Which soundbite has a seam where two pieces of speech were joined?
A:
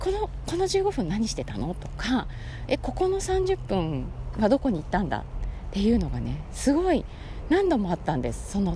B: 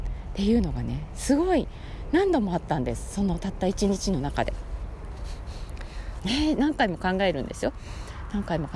B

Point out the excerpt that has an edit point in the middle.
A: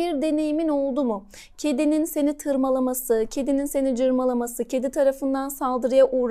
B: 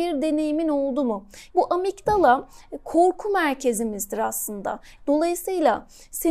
B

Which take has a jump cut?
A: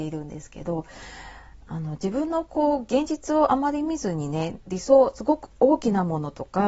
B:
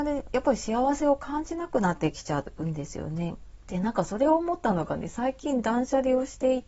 B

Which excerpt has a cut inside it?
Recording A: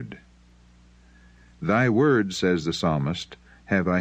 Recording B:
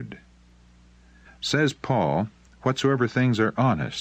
B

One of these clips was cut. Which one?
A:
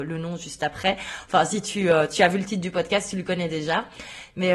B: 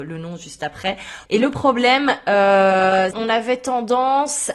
B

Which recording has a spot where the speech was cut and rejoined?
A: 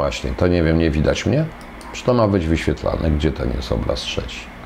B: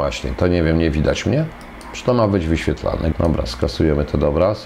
B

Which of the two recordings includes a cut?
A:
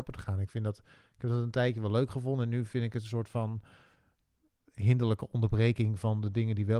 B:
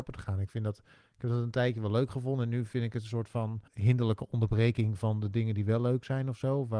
B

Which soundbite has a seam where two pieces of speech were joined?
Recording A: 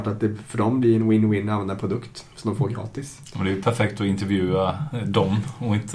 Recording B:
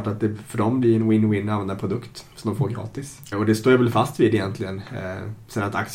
B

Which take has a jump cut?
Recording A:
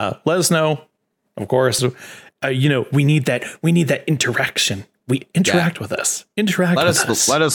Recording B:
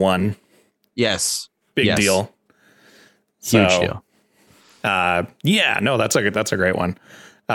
A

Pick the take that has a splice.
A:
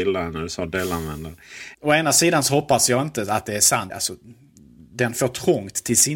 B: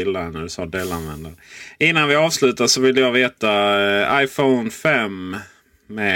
A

